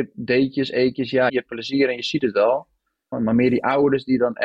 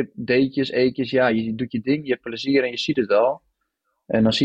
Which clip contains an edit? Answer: first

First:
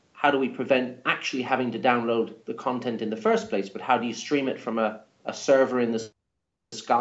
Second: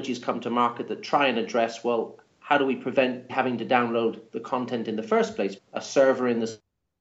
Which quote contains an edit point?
second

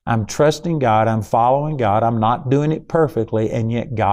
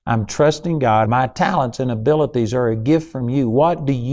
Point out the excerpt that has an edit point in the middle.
second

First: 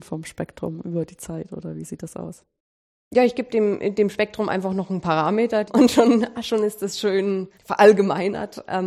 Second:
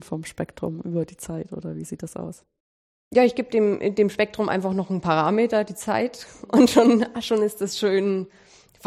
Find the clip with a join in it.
first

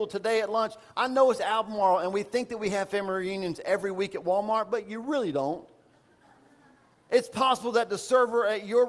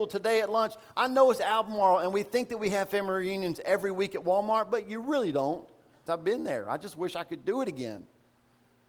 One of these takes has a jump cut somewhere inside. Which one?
second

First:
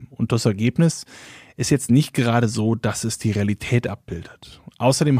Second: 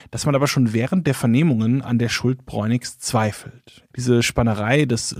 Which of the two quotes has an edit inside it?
second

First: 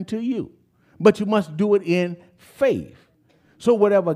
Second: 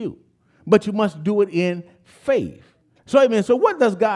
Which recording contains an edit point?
second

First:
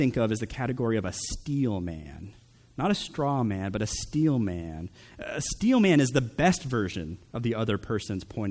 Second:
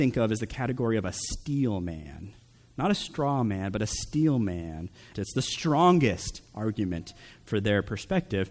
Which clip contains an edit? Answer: second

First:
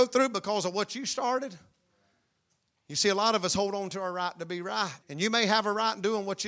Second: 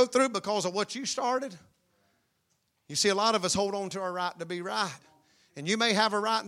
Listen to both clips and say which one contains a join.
first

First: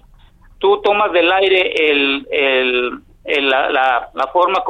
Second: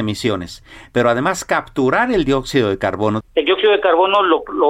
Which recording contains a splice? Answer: second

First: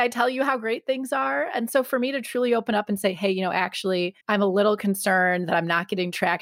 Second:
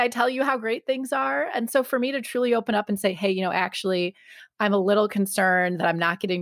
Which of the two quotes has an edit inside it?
first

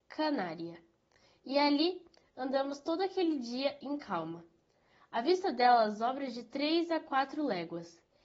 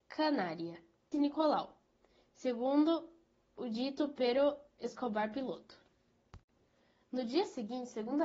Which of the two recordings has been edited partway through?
second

